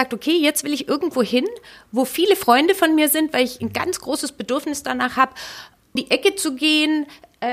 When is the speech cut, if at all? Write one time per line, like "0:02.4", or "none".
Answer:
0:06.0